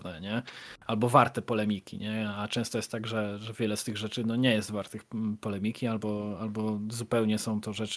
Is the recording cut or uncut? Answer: uncut